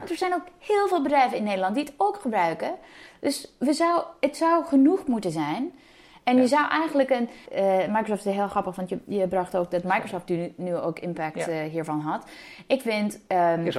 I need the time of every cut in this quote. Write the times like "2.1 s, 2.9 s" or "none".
7.5 s